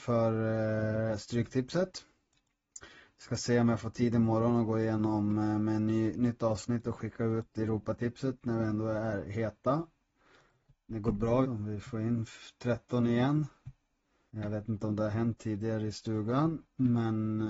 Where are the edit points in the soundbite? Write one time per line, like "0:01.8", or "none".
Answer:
0:11.4
0:14.3